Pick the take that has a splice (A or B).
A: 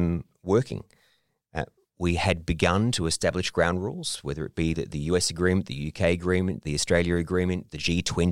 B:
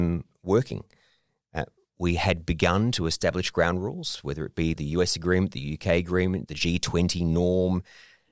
B